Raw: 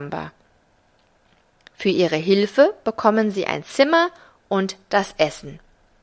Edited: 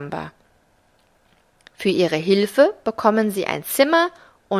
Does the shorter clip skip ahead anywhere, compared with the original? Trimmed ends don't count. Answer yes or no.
no